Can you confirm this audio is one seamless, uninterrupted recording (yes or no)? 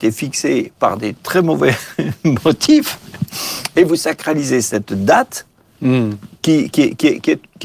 yes